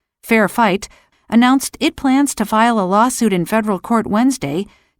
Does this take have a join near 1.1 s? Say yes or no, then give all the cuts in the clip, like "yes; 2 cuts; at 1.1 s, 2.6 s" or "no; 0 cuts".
yes; 1 cut; at 1.1 s